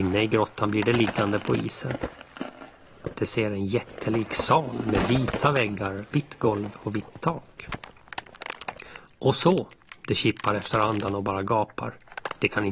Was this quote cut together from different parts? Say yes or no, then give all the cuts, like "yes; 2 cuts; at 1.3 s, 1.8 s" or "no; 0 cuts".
no; 0 cuts